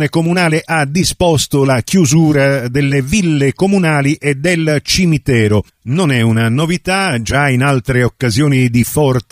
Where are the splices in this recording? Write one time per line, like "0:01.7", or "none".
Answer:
none